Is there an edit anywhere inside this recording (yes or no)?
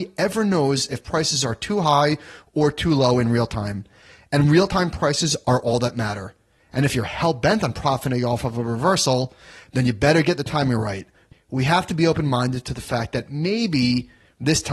yes